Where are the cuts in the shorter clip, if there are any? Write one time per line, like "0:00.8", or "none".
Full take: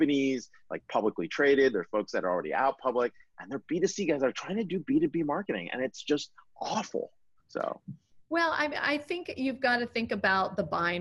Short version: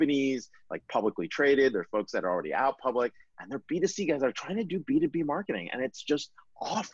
none